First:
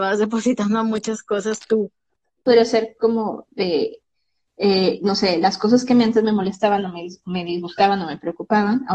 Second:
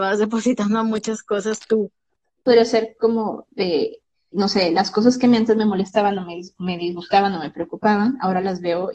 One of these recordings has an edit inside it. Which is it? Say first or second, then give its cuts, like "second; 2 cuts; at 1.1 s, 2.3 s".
second; 1 cut; at 4.3 s